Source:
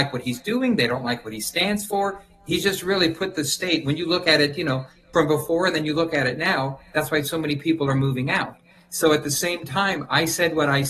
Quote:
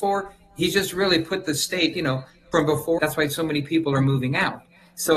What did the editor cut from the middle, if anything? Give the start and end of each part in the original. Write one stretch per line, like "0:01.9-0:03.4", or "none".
0:03.8-0:04.5
0:05.6-0:06.9